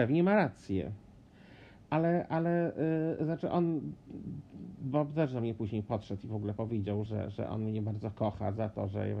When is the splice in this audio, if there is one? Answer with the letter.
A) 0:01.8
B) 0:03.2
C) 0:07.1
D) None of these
C